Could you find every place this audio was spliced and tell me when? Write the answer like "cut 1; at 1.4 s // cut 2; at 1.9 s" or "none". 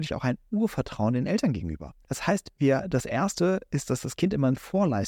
cut 1; at 2.0 s